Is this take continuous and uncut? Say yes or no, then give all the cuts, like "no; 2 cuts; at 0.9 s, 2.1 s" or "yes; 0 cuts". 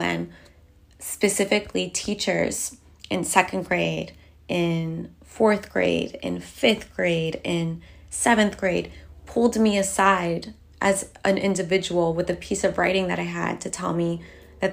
yes; 0 cuts